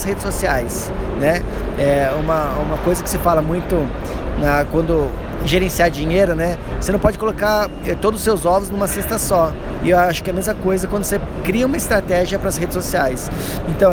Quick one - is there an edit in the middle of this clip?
no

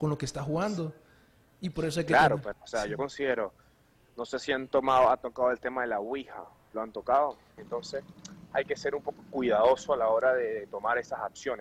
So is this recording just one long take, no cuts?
no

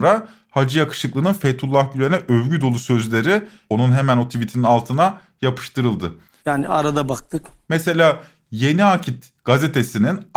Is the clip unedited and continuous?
no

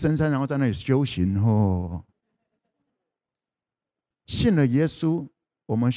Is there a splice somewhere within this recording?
no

